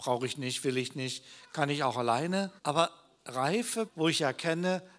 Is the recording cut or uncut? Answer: cut